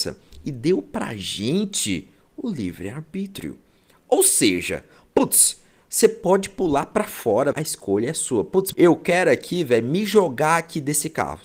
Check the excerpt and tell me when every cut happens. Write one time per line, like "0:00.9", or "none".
0:07.5
0:08.7